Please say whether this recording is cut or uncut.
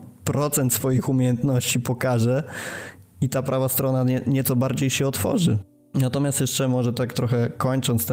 cut